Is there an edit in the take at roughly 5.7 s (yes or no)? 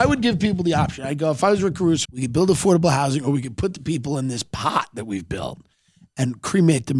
no